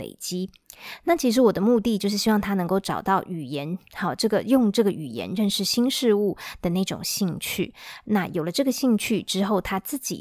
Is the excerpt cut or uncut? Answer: uncut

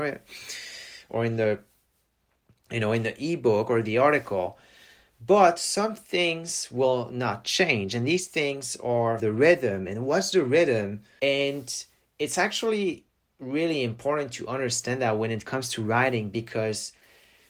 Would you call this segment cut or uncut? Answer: cut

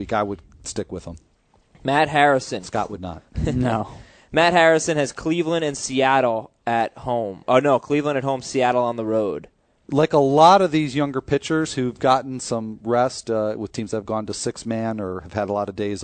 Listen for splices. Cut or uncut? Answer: uncut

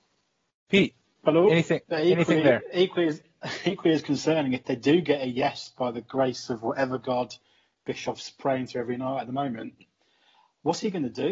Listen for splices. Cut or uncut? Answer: uncut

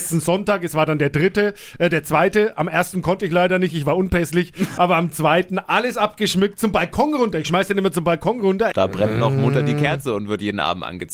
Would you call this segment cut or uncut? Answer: cut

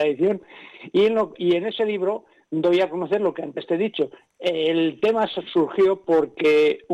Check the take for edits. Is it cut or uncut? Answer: cut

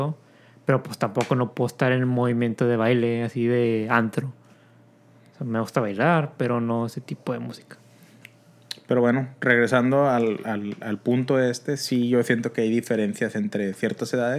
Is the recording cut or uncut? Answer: uncut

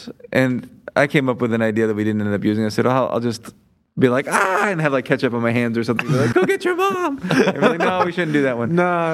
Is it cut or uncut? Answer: cut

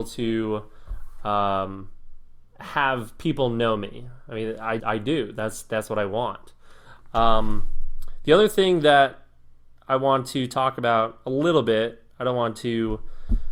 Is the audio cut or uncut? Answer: cut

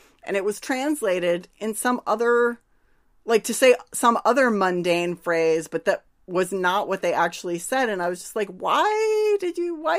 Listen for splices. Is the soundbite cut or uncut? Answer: uncut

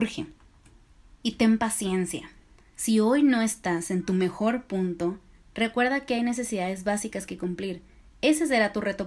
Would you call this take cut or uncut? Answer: uncut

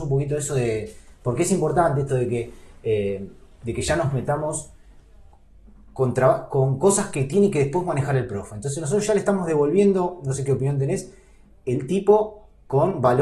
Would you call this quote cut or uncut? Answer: uncut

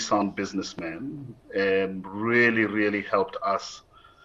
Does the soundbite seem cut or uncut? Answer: uncut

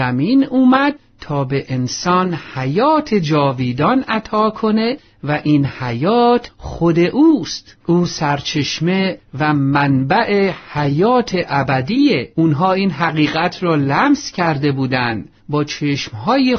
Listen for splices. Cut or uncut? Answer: cut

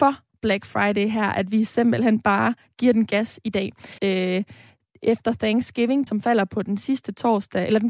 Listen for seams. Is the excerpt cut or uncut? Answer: cut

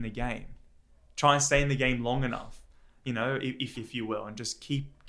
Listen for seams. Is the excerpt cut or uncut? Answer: cut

